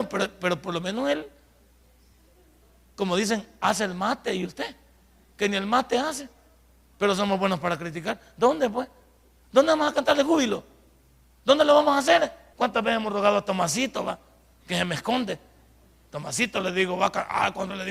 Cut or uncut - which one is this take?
cut